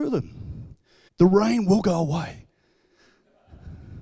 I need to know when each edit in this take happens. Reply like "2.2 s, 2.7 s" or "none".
1.1 s